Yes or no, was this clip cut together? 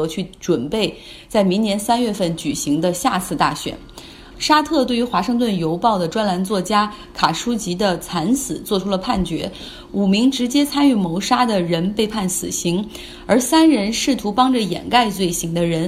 yes